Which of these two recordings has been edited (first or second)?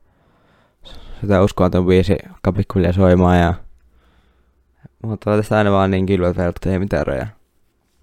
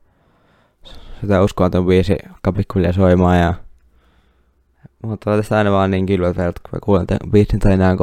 first